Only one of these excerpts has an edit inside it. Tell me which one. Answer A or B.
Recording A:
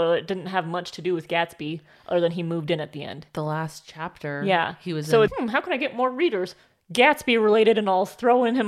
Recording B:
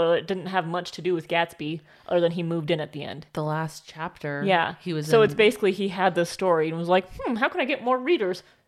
A